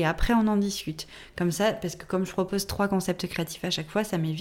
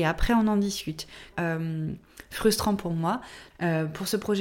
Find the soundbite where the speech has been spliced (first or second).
second